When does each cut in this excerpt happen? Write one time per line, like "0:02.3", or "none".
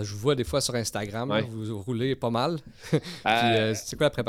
none